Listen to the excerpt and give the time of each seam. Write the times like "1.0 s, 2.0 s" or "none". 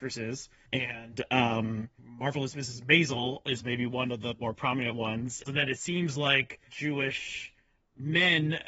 5.4 s, 6.7 s